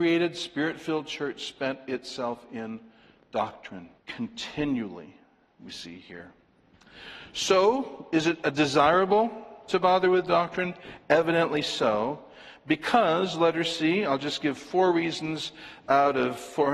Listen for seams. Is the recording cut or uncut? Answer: cut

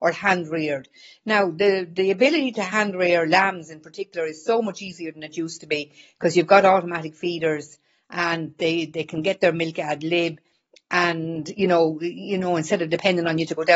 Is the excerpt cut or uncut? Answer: uncut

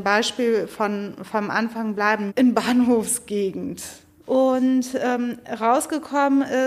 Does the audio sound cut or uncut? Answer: cut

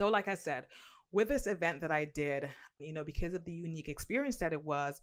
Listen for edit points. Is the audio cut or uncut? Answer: cut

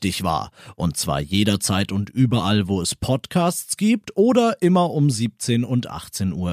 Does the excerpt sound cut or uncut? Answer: uncut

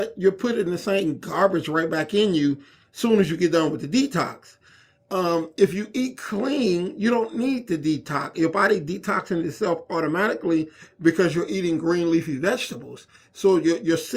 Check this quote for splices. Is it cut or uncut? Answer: uncut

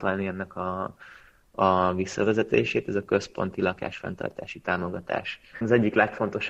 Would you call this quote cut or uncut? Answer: cut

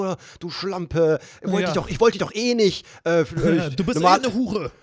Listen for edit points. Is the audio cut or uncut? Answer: uncut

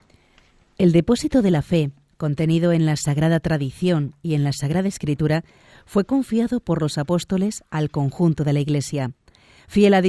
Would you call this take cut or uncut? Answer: uncut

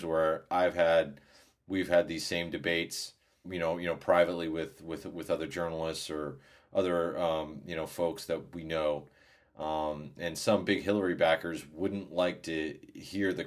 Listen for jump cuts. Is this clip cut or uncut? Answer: cut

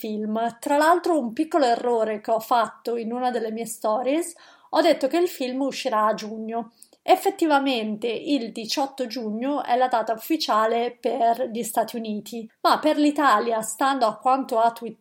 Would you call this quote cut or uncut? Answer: uncut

